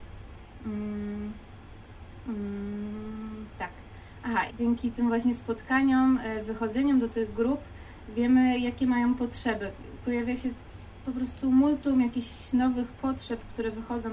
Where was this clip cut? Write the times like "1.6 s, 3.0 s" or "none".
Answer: 4.5 s